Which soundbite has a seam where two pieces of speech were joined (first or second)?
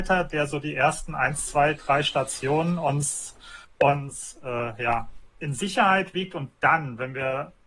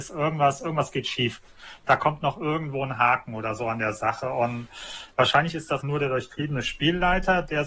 second